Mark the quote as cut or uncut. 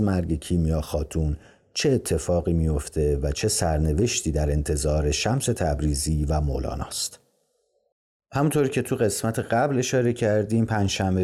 uncut